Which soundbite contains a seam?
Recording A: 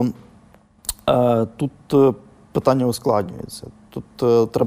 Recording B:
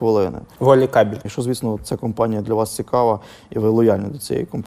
B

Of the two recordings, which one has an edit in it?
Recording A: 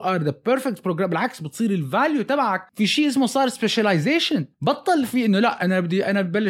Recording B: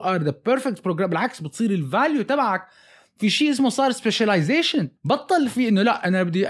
A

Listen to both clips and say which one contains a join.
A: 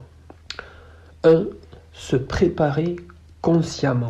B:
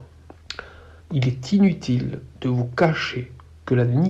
B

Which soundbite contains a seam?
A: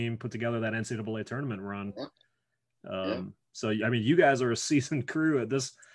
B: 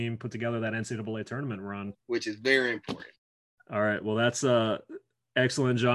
B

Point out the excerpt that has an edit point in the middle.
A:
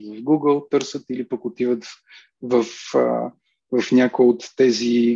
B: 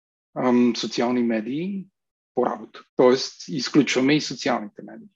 B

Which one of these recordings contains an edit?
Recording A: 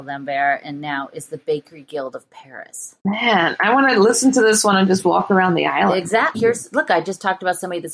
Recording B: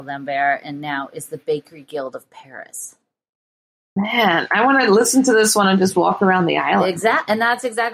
A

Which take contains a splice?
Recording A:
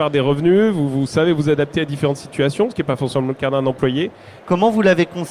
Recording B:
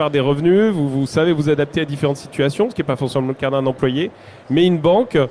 A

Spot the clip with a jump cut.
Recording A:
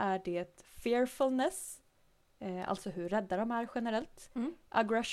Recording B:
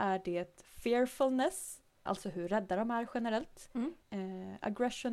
B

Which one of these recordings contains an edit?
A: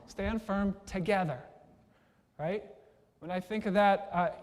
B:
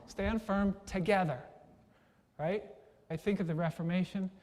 B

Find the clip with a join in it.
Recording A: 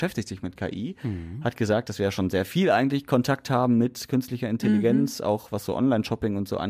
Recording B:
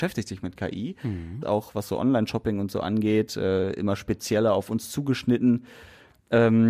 B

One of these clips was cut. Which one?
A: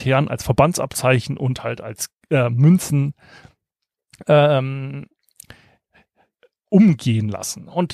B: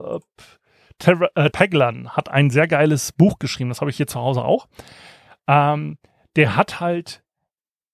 B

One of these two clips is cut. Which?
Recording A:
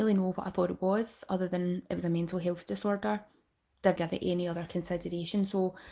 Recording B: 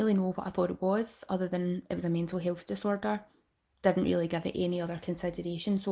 A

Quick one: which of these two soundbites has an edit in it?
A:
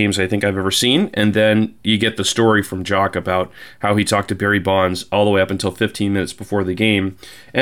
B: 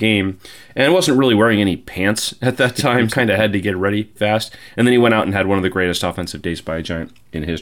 B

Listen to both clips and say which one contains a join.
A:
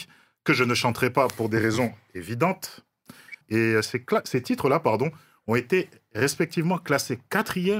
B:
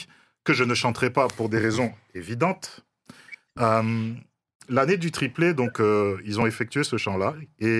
A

